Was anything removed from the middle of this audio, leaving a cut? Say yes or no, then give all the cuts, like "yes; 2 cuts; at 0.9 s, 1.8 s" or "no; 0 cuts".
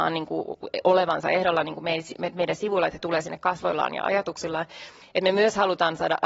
yes; 1 cut; at 5.0 s